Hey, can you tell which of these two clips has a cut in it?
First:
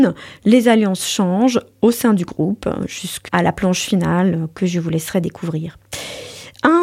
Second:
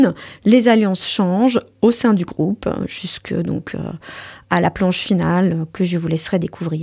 first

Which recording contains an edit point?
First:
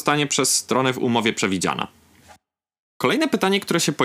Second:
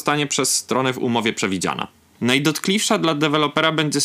second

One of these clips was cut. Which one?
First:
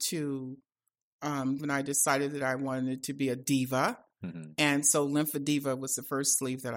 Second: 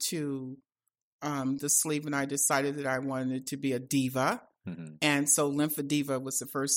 first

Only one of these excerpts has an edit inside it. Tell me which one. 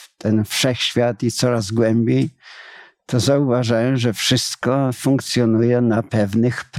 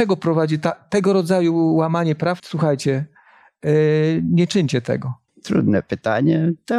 second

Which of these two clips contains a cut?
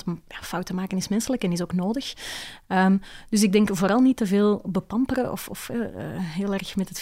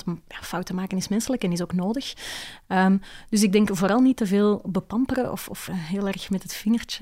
second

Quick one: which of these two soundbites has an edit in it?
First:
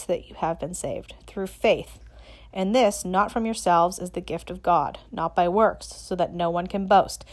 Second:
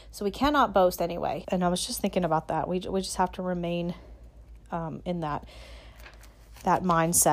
second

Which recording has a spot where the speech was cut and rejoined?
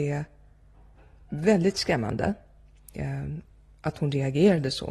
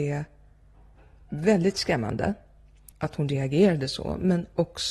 second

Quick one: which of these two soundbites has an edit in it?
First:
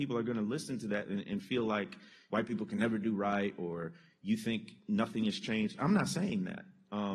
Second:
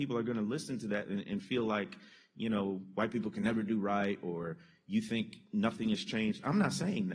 first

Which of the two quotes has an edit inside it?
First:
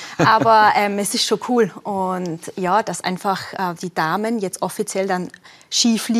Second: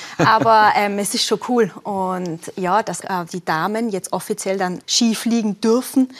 second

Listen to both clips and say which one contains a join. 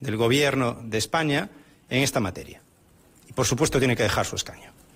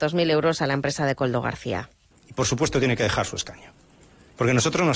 second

